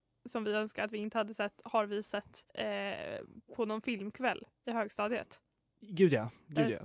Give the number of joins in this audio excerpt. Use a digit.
1